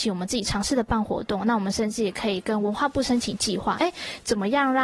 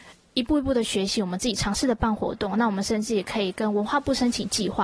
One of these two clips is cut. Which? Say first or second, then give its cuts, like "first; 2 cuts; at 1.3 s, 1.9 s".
first; 1 cut; at 3.8 s